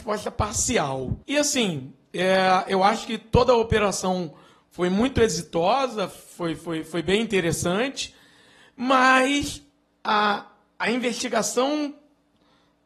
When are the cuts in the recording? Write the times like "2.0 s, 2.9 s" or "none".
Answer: 1.2 s